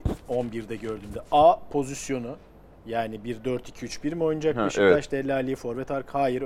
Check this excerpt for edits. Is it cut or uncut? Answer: uncut